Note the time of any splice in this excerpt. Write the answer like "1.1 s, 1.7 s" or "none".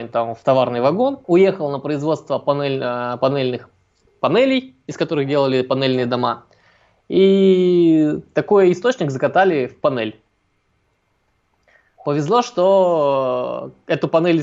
1.2 s